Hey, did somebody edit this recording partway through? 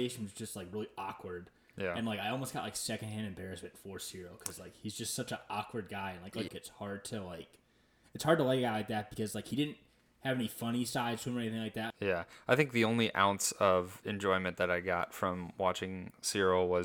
yes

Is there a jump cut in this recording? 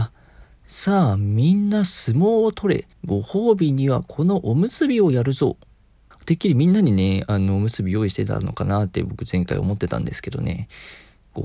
yes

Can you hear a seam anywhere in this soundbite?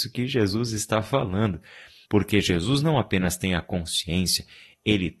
yes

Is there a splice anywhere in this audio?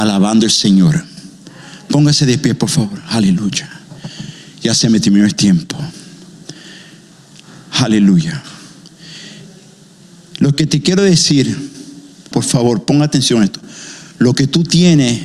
yes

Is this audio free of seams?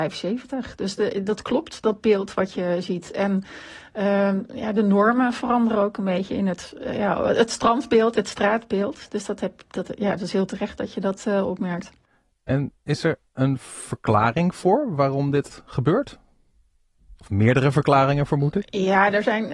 yes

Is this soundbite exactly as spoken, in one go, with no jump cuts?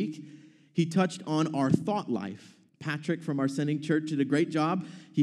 no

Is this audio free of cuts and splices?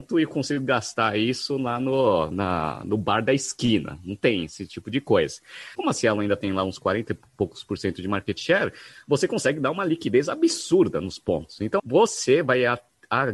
no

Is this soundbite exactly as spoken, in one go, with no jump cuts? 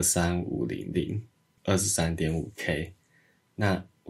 no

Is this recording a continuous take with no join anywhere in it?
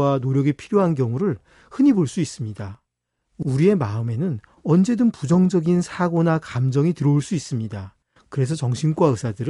no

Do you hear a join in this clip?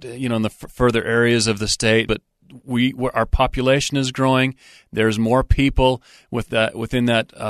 yes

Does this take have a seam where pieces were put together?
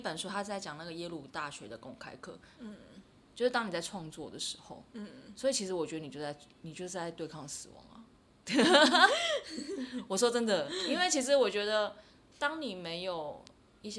yes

